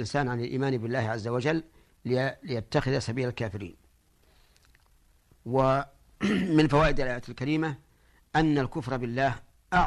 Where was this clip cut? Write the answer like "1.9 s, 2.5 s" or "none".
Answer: none